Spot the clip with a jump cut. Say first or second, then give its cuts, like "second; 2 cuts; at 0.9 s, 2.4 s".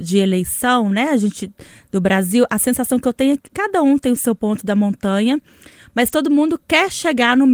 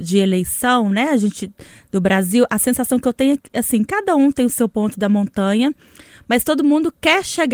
first; 1 cut; at 3.5 s